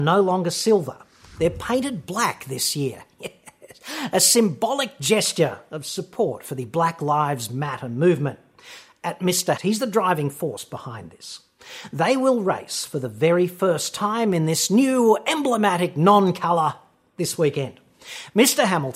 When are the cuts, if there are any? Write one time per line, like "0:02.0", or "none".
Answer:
0:09.6